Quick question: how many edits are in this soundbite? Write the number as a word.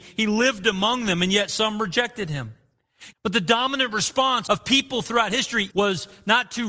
three